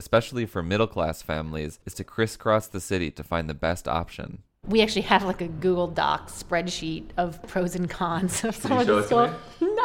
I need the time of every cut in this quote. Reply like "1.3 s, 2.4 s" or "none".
1.8 s

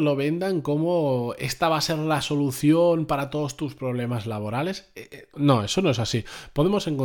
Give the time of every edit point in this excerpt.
5.3 s

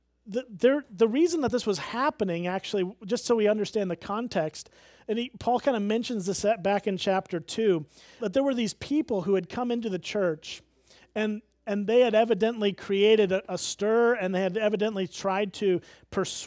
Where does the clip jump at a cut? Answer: 8.2 s

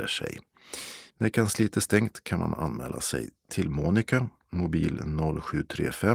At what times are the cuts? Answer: 1.1 s

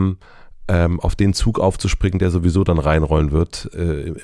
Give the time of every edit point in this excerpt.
none

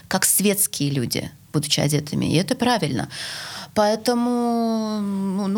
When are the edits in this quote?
none

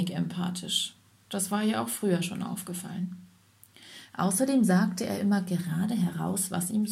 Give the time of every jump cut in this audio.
none

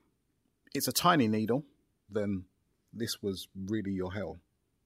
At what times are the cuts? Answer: 2.1 s

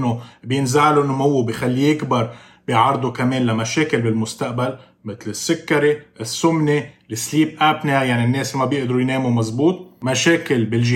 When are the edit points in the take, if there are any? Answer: none

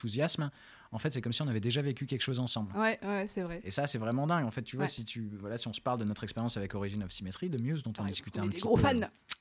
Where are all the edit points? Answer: none

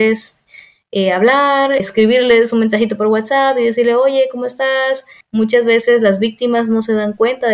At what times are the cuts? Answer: 1.8 s, 5.2 s

